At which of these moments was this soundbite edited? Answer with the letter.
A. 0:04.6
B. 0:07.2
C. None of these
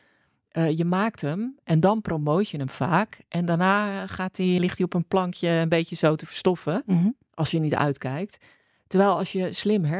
A